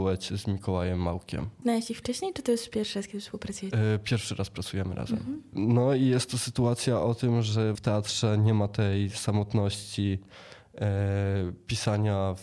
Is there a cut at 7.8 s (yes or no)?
yes